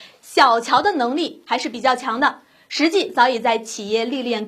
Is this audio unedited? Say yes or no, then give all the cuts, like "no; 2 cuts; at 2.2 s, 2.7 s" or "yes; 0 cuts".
yes; 0 cuts